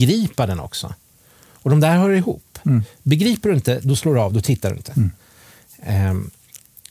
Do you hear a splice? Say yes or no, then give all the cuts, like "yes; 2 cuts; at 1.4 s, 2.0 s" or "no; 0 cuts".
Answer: no; 0 cuts